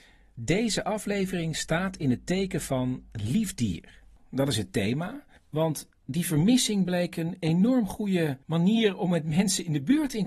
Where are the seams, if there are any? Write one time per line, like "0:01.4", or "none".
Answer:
0:05.4
0:08.4